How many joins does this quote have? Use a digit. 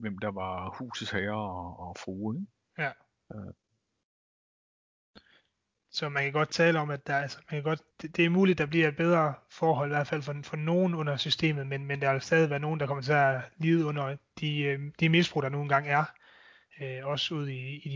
1